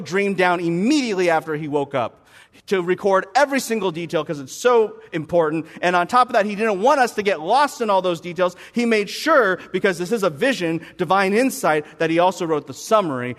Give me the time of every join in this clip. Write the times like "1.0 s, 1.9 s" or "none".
none